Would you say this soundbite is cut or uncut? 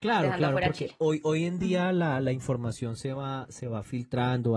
uncut